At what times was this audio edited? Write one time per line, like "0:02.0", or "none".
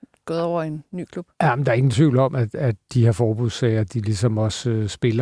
none